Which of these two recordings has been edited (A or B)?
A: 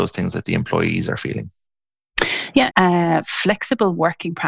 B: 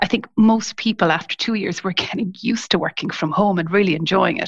A